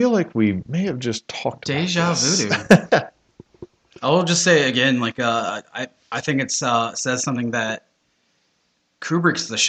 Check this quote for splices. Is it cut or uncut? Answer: uncut